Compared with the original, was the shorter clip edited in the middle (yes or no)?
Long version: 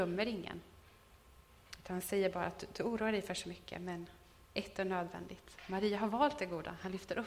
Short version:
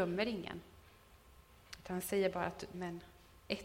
yes